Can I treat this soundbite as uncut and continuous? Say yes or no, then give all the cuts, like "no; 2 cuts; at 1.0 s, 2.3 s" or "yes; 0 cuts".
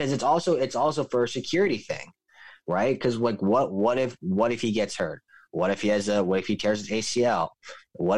yes; 0 cuts